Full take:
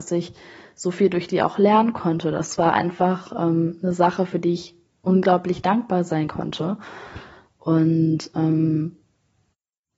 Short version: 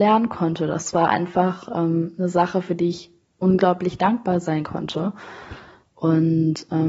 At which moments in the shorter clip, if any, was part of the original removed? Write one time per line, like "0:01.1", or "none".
none